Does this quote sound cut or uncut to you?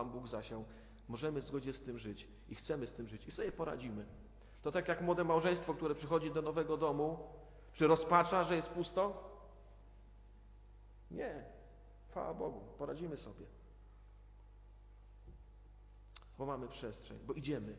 cut